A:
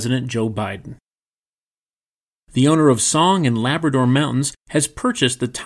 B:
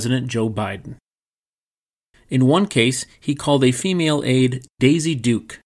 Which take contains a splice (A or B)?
B